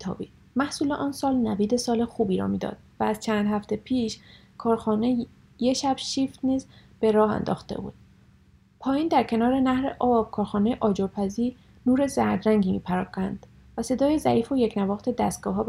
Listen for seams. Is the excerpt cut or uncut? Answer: uncut